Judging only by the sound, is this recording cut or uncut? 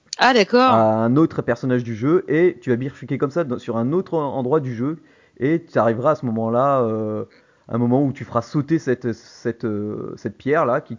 uncut